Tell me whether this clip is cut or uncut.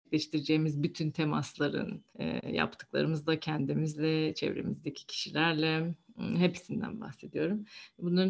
cut